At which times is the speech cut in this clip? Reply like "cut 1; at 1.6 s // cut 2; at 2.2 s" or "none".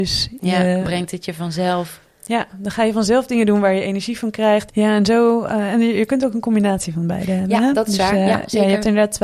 cut 1; at 4.7 s